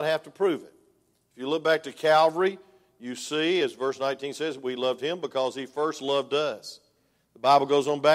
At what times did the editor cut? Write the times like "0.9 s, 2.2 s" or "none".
none